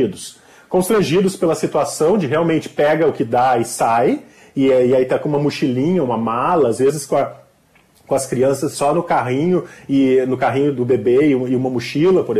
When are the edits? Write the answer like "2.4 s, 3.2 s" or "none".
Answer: none